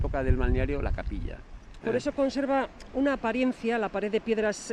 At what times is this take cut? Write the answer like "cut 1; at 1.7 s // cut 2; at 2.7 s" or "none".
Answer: cut 1; at 1.8 s